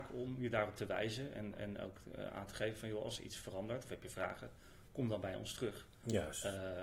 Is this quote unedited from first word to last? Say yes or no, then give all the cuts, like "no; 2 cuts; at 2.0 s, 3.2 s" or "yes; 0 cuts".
yes; 0 cuts